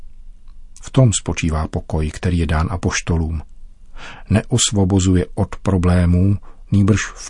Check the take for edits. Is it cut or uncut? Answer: uncut